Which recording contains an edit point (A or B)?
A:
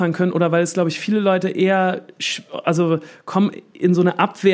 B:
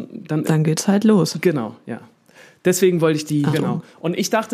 B